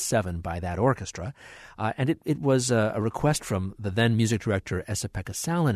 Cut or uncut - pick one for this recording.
uncut